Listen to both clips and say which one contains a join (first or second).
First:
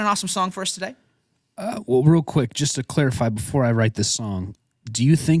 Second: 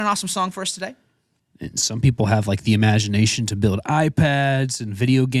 second